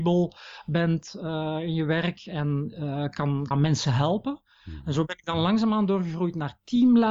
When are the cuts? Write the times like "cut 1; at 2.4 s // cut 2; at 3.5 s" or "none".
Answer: cut 1; at 3.5 s